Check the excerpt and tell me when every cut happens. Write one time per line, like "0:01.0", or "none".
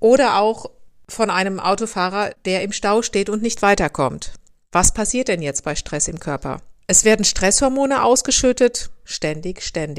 0:06.8
0:09.1

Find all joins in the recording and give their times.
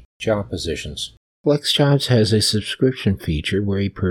0:01.3

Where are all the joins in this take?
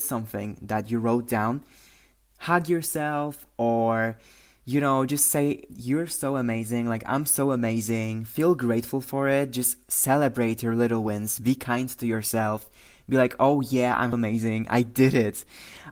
0:14.1

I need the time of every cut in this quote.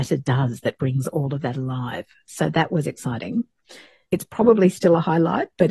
0:04.1

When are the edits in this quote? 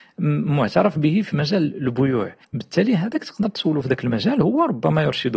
0:02.4

